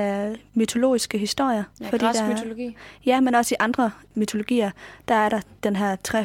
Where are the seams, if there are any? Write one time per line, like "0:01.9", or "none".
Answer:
0:01.7